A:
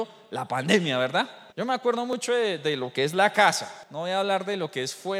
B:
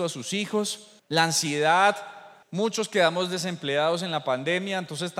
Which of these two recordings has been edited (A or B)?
A